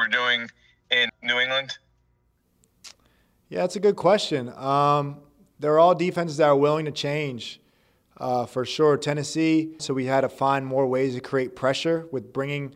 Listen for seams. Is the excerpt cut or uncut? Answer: cut